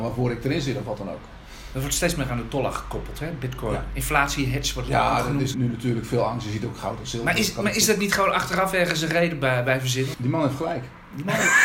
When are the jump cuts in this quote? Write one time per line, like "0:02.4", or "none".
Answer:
0:05.5
0:10.1